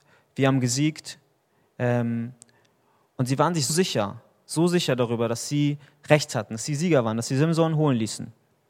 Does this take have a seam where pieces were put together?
yes; 1 cut; at 3.7 s

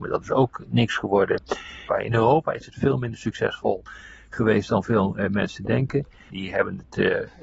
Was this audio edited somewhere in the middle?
yes; 2 cuts; at 1.9 s, 6.3 s

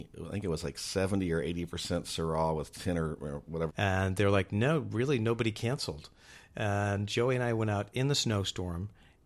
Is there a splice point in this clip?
yes; 1 cut; at 3.7 s

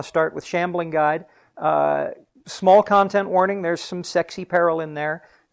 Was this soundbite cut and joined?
no; 0 cuts

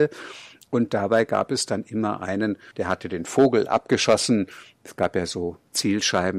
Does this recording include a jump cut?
yes; 1 cut; at 2.7 s

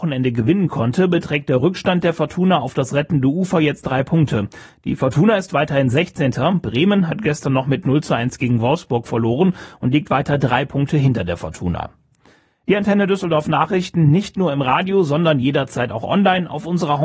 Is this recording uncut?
yes; 0 cuts

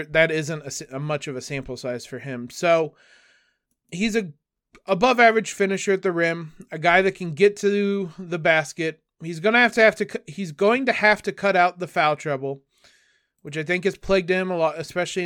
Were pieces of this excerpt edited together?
no; 0 cuts

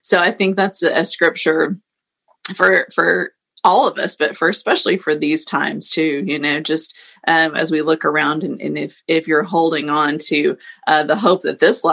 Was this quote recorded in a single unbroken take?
yes; 0 cuts

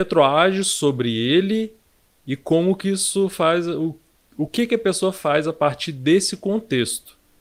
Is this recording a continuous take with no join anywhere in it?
yes; 0 cuts

